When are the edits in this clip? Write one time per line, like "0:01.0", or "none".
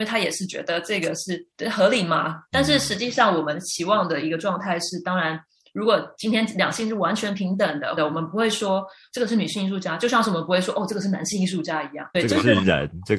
0:02.5
0:08.0
0:12.1